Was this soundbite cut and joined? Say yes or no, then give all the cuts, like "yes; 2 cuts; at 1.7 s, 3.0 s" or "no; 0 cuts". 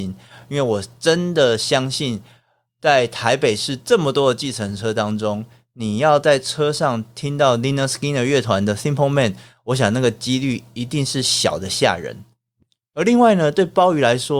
no; 0 cuts